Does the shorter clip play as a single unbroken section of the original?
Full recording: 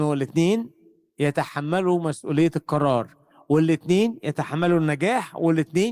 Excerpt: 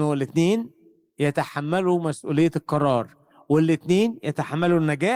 yes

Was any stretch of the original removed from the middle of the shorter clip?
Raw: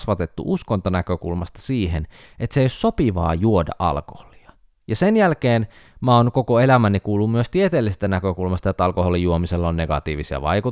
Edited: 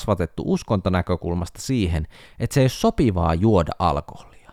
no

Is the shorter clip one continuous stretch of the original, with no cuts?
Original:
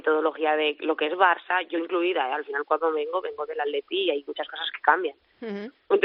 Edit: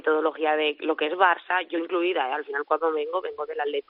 yes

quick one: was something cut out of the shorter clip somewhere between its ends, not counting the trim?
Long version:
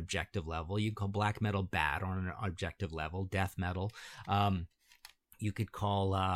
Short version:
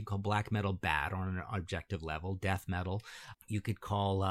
yes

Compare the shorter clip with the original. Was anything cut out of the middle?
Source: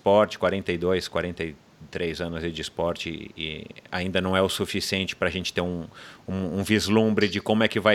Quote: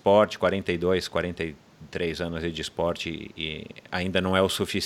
no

